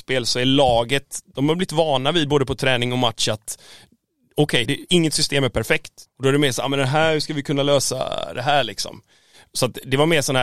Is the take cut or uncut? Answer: cut